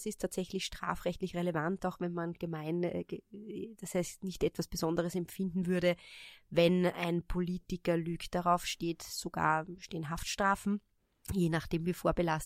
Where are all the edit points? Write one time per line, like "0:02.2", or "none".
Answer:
none